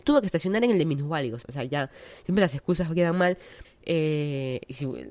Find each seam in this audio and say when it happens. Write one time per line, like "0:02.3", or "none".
0:01.4
0:03.6